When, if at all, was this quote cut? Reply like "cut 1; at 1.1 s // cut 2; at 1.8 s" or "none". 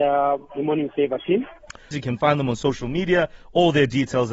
cut 1; at 1.9 s